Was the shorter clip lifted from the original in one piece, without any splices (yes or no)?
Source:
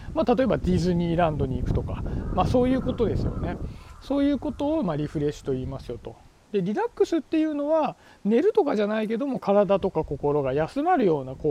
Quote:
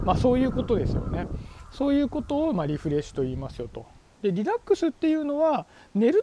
yes